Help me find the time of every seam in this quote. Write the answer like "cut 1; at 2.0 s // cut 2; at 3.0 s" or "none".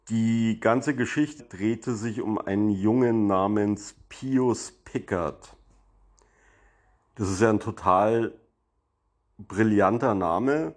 cut 1; at 1.4 s